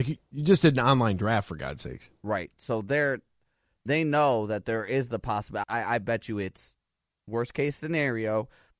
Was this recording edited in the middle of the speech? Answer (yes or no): yes